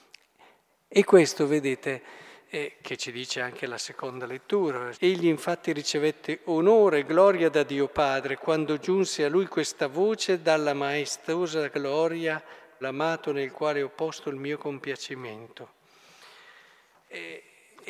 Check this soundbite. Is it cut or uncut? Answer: cut